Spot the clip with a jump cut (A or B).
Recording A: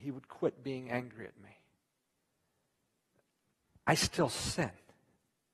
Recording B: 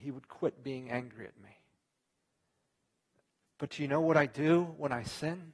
B